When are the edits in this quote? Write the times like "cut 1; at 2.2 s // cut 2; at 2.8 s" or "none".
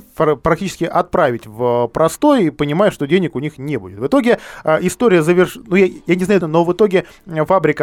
cut 1; at 6.4 s